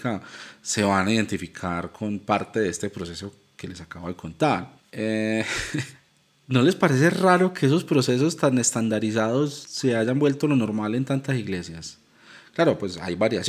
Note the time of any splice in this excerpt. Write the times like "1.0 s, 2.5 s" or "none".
4.9 s